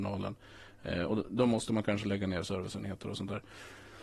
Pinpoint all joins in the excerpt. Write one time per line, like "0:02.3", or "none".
none